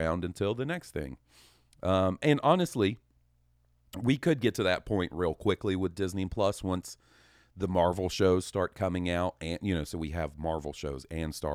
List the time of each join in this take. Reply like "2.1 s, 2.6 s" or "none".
none